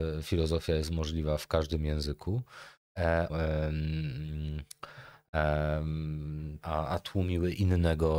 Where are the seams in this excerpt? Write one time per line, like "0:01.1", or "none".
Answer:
0:03.3
0:06.6